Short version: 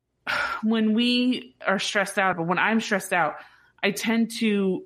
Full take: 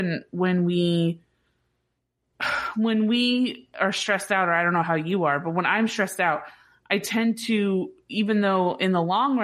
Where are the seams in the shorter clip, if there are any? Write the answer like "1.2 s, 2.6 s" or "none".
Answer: 2.3 s

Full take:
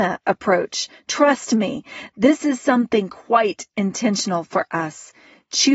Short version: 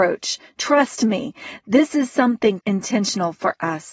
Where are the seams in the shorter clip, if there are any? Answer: 2.6 s

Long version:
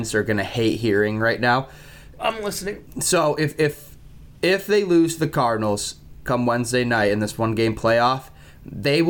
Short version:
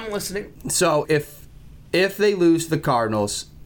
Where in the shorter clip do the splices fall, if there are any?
1.0 s

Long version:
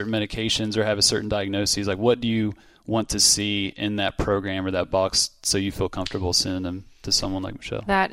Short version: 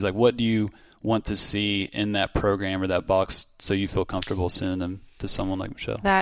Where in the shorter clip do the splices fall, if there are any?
none

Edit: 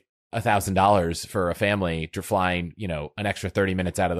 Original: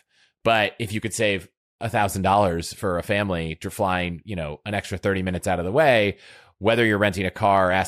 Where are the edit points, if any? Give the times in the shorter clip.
none

